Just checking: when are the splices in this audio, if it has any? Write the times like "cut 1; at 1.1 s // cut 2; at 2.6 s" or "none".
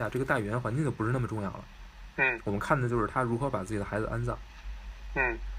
none